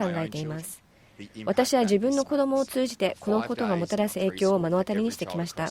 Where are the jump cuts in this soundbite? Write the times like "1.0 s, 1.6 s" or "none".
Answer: none